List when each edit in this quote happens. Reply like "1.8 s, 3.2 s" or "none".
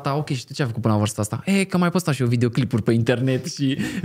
none